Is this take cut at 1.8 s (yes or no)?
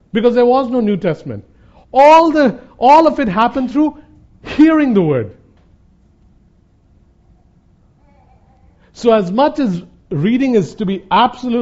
no